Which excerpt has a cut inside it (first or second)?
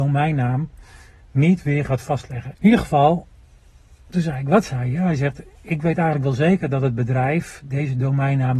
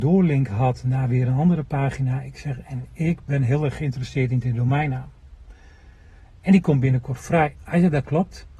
first